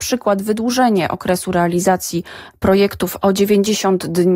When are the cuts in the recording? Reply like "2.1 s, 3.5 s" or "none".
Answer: none